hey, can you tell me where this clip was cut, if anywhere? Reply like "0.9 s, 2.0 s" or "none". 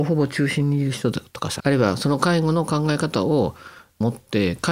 1.6 s